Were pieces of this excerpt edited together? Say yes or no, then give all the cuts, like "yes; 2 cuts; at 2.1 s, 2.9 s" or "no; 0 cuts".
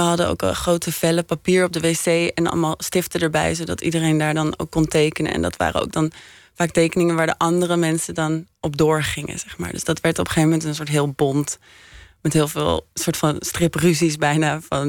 no; 0 cuts